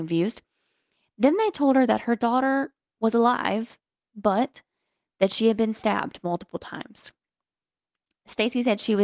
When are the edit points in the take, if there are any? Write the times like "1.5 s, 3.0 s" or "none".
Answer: none